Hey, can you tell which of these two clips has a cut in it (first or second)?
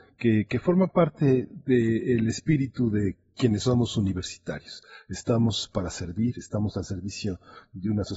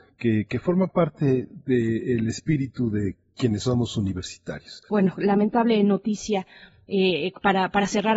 second